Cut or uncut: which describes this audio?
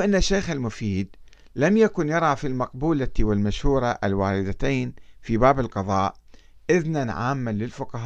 uncut